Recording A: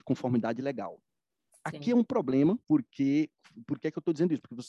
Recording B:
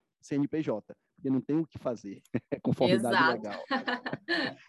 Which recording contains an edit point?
A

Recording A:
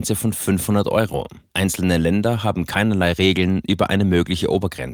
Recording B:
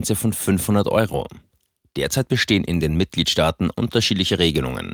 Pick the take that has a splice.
A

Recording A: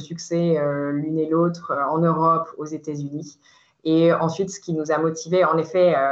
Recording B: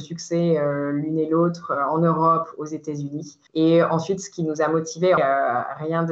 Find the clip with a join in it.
B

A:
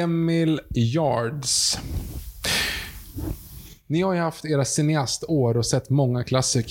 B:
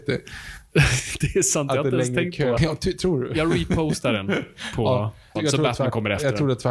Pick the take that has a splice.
B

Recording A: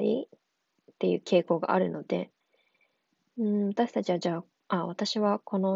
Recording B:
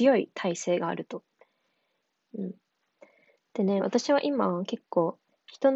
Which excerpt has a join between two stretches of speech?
B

